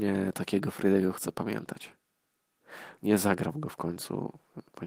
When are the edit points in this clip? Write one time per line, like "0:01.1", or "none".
0:03.0